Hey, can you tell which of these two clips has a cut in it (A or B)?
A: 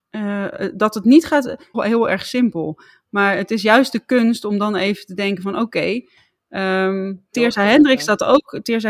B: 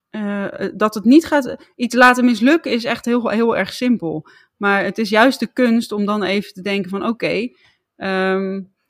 A